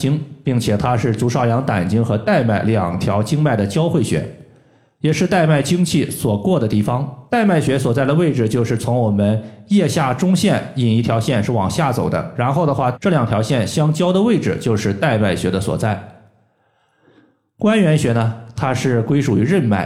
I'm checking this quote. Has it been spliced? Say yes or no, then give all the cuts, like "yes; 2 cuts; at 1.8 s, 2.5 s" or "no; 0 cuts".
yes; 2 cuts; at 7.3 s, 12.9 s